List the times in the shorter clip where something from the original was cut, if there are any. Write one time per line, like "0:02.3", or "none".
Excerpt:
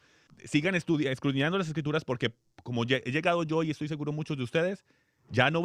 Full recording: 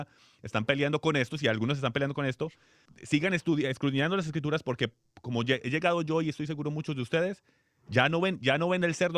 none